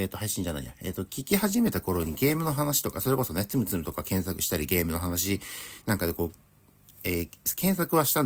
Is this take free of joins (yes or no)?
yes